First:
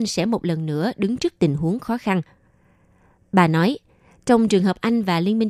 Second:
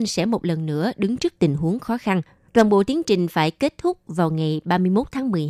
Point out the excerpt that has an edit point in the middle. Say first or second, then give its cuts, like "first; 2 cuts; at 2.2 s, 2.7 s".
second; 1 cut; at 2.5 s